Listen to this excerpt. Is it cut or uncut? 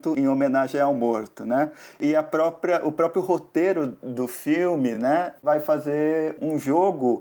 uncut